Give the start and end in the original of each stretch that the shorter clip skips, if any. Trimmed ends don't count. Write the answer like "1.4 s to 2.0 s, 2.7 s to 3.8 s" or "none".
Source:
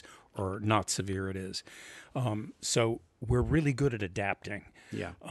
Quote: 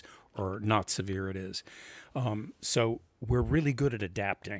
none